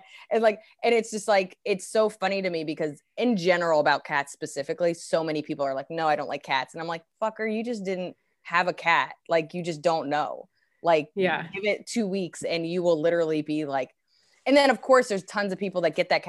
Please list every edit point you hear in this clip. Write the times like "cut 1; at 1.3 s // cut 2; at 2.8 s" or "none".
none